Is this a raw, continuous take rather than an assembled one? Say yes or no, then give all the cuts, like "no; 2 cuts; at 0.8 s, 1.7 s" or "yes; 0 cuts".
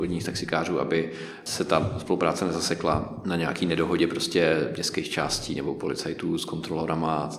yes; 0 cuts